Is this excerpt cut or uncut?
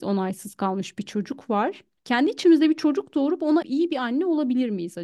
cut